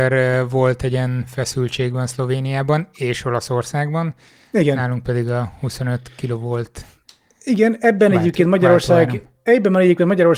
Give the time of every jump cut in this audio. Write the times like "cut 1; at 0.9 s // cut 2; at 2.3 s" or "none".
none